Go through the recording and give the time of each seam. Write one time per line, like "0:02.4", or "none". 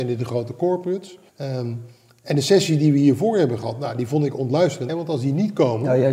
0:01.3
0:04.9